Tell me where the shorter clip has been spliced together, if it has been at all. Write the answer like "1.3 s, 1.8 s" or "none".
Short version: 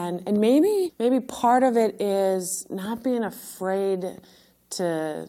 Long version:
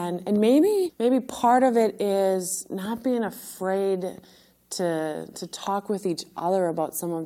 none